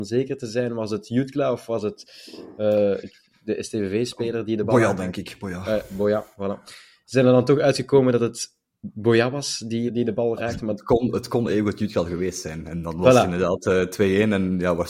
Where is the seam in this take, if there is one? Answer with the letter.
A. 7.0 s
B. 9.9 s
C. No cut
B